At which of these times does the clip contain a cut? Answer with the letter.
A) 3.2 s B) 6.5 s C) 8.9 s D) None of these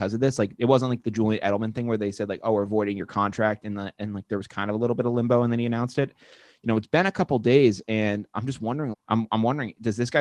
C